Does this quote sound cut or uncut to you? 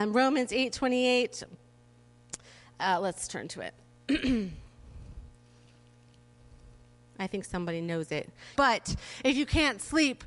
cut